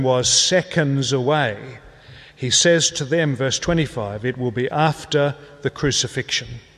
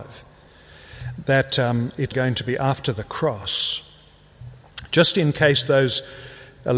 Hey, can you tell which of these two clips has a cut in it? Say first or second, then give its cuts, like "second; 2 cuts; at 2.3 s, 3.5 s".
second; 1 cut; at 2.1 s